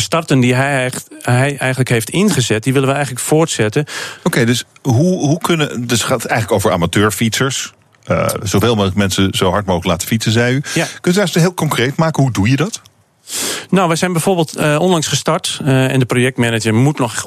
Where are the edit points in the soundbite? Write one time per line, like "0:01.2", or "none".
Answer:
0:04.2

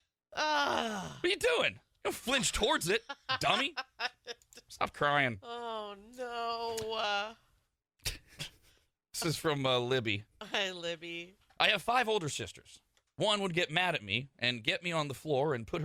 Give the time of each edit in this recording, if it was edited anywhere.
none

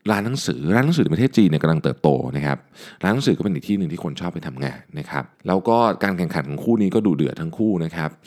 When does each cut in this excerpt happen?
0:05.3

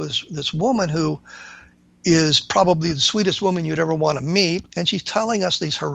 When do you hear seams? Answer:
0:04.7

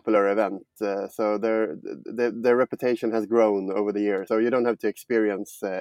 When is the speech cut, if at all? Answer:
0:02.3
0:04.3

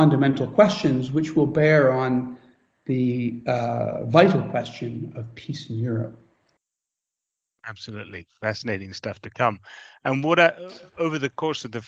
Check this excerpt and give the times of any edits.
none

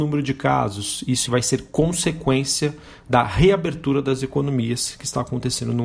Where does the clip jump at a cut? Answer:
0:01.3

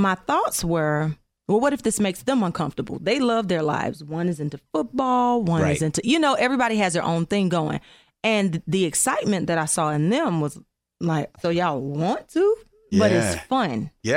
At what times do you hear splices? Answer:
0:11.3
0:12.9

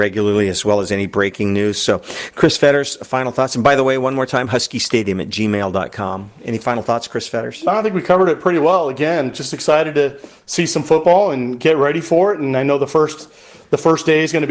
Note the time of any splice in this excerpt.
none

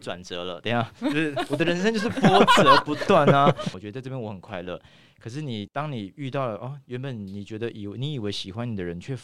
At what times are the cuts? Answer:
0:03.7

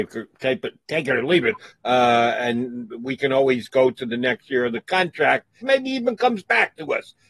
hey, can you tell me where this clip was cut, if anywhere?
0:01.7
0:05.6

